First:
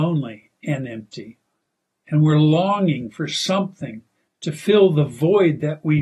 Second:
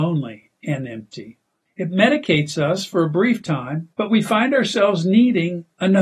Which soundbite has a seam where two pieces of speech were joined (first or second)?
second